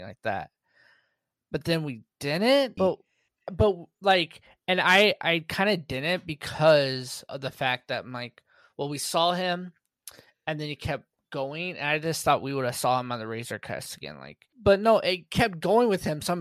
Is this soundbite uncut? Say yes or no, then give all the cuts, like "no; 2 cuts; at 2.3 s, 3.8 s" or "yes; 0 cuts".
no; 2 cuts; at 2.8 s, 14.5 s